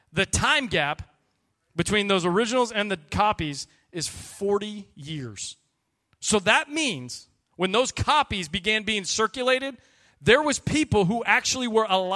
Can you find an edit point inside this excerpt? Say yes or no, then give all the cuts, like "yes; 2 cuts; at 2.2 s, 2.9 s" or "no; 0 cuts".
no; 0 cuts